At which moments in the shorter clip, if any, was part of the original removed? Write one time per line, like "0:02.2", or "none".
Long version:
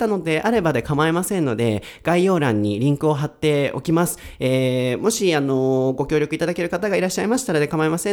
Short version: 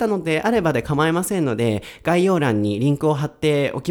none